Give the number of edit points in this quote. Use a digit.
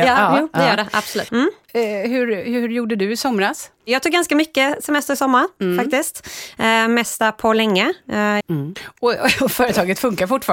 2